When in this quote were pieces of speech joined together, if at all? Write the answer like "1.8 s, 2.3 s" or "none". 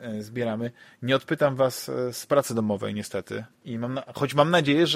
3.6 s

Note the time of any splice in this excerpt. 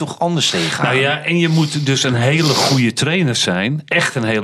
none

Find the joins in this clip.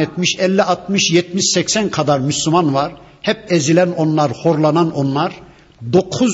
none

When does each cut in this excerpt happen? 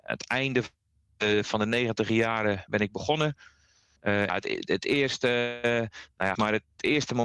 4.3 s, 6.4 s

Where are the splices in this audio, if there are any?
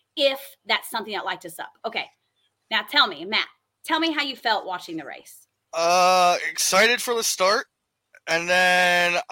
none

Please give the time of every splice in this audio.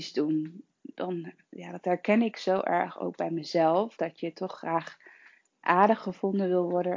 4.0 s

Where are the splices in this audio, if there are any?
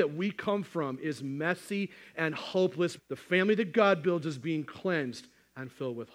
3.0 s

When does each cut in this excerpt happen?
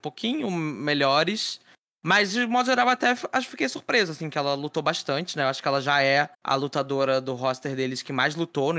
6.3 s

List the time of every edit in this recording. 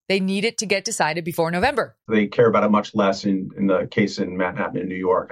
2.1 s

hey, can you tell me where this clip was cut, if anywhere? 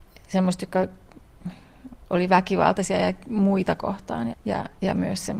4.3 s

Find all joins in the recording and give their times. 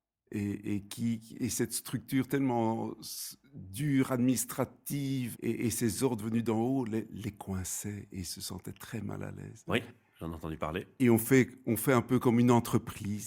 5.3 s, 9.7 s

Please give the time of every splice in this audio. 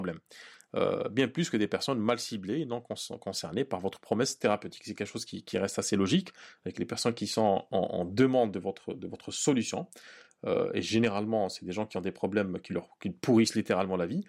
none

